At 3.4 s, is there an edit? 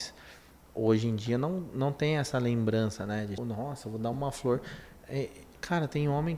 yes; 1 cut; at 3.4 s

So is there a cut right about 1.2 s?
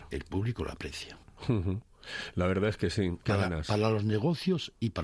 yes; 2 cuts; at 1.2 s, 3.2 s

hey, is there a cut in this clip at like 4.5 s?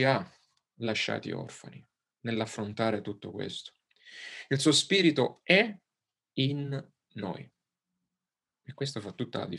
no; 0 cuts

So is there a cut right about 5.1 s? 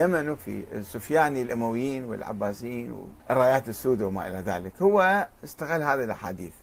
no; 1 cut; at 3.2 s

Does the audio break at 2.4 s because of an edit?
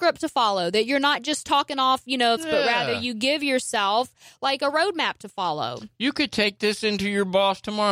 yes; 1 cut; at 2.4 s

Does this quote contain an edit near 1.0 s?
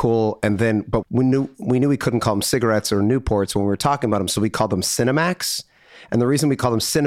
yes; 1 cut; at 1.0 s

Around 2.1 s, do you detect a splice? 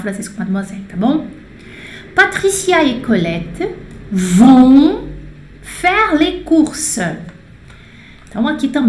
no; 0 cuts

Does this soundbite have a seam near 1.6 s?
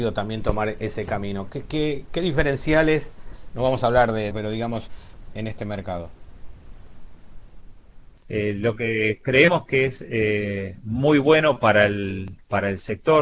no; 2 cuts; at 4.3 s, 5.4 s

